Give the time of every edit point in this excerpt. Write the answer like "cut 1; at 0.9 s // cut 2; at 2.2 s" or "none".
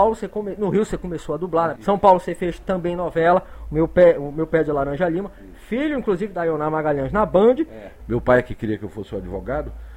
cut 1; at 1.7 s // cut 2; at 8.0 s